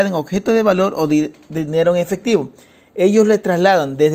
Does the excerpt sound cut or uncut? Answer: uncut